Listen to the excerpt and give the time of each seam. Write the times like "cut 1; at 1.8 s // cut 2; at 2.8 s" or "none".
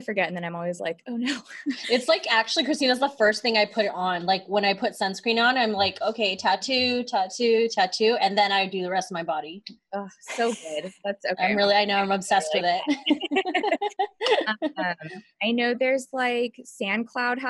none